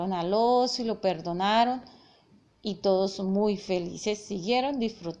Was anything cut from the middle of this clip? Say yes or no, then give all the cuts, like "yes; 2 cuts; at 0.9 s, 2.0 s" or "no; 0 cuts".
no; 0 cuts